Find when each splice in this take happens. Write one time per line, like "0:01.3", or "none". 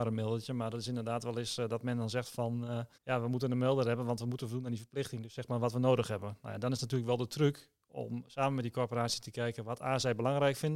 0:02.9

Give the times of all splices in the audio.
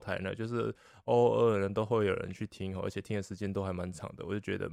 none

